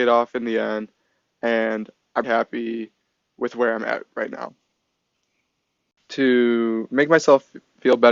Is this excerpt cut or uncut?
cut